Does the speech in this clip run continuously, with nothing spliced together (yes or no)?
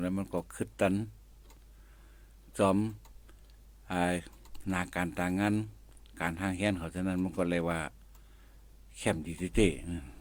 yes